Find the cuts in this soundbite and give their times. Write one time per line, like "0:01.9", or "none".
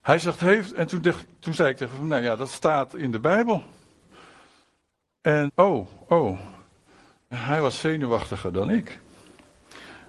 0:05.5
0:07.3